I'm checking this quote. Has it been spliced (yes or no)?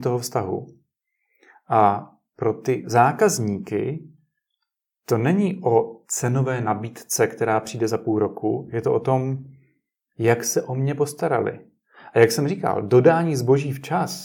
no